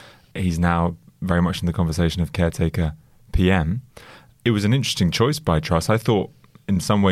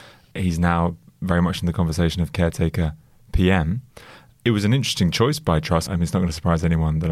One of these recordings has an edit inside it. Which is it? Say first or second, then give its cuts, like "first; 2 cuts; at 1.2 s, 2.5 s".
second; 1 cut; at 5.9 s